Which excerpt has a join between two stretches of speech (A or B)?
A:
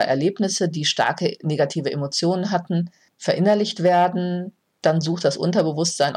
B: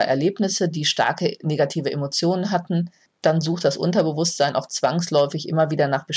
B